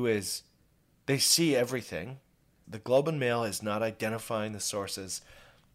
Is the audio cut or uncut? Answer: cut